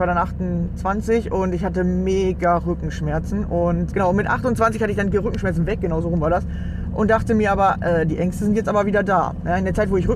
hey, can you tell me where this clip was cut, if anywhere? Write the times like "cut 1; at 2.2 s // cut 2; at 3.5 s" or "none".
cut 1; at 3.9 s

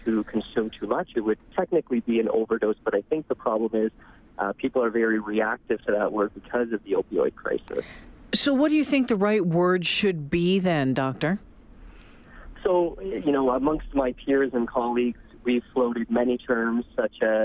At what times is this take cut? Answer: none

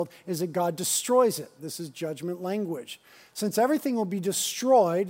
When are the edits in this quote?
cut 1; at 1.6 s

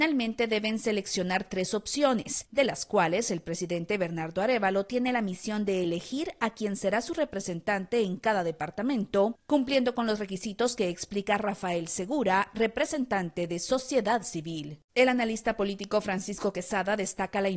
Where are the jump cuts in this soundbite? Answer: cut 1; at 14.9 s

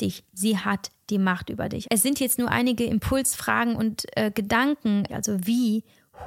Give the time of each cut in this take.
cut 1; at 1.8 s // cut 2; at 5.1 s

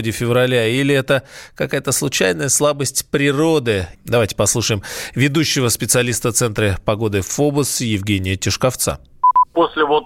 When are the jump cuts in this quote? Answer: cut 1; at 3.9 s

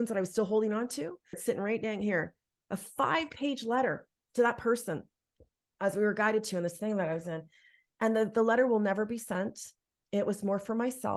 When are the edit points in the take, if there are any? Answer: cut 1; at 1.3 s

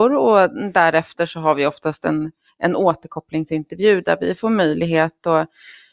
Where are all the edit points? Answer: none

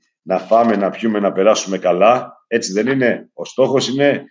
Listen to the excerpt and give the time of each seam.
none

